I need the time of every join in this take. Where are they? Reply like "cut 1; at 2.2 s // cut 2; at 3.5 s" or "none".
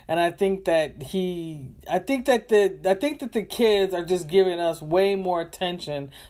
none